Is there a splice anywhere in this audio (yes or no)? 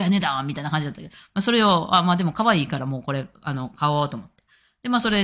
no